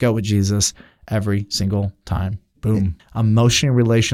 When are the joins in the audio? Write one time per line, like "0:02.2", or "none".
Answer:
0:03.0